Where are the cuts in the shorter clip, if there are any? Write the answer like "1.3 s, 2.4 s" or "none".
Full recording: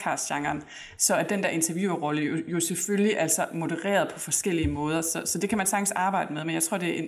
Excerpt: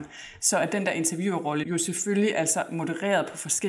1.6 s